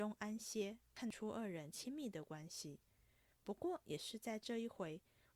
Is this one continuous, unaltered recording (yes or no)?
yes